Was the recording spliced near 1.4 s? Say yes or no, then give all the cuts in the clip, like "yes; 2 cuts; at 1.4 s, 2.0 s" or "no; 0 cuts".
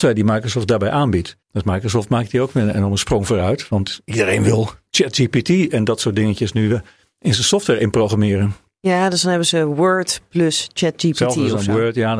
yes; 1 cut; at 1.4 s